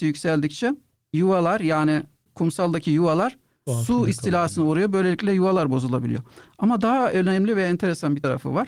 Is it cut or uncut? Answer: cut